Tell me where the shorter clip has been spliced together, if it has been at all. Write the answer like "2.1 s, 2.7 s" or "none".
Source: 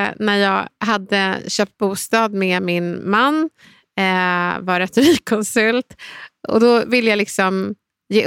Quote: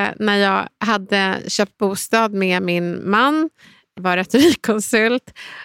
4.0 s